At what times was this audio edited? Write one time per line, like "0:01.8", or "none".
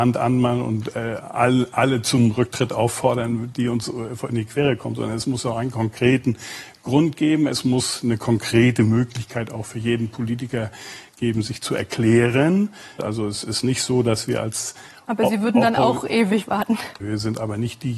0:13.0
0:17.0